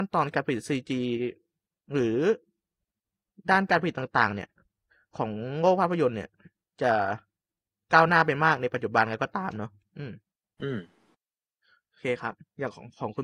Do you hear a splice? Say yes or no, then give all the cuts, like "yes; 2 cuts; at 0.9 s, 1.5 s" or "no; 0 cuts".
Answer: no; 0 cuts